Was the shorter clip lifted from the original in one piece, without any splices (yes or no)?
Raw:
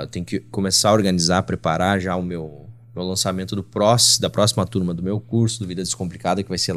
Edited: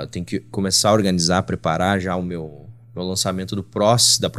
yes